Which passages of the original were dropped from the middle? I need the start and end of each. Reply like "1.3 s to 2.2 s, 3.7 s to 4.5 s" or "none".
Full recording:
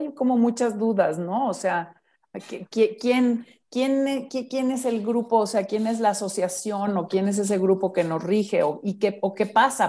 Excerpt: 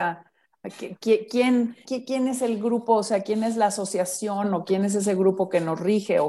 3.6 s to 4.3 s

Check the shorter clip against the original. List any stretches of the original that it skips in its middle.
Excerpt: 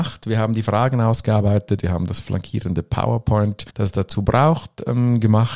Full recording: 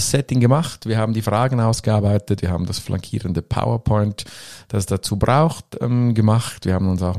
4.3 s to 4.6 s

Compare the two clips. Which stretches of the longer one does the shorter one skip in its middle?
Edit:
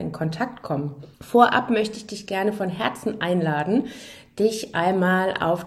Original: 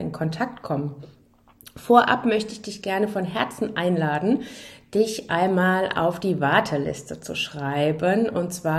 1.1 s to 1.7 s

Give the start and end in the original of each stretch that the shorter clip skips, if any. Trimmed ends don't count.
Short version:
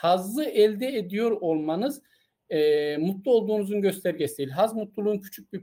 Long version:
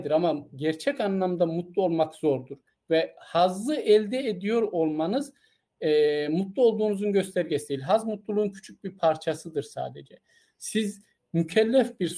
none

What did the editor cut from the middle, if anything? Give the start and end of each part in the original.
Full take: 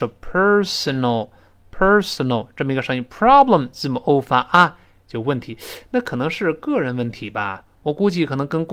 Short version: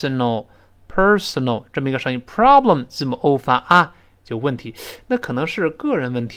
none

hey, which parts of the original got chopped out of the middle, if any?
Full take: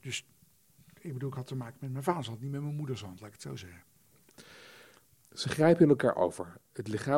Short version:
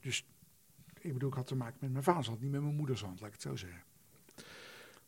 none

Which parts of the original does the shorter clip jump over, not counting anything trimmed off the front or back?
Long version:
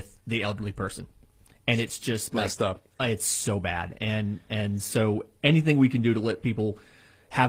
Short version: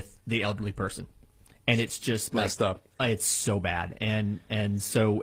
none

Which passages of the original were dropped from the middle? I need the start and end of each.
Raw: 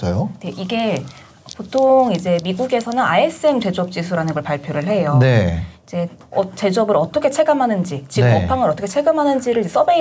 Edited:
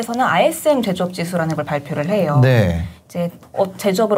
none

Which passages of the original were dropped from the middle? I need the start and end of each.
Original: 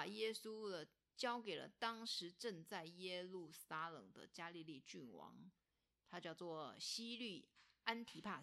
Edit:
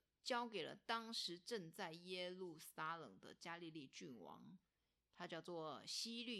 none

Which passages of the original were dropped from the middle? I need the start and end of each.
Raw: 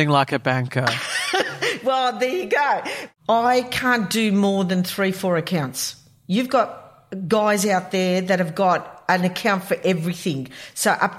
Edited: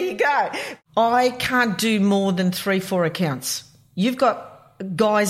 none

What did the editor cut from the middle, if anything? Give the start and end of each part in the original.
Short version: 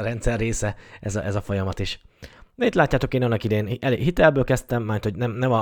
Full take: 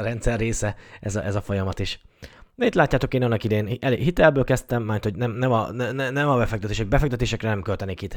none

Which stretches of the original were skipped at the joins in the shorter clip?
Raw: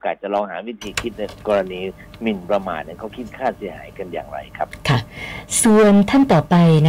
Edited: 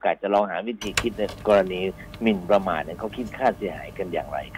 none

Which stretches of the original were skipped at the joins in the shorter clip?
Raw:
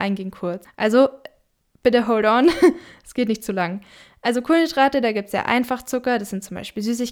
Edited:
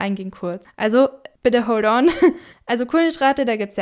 1.4 s to 1.8 s, 2.9 s to 4.1 s

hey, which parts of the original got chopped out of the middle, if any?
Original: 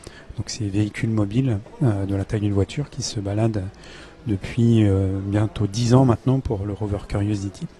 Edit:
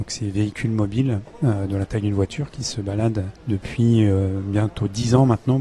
3.8 s to 4.2 s

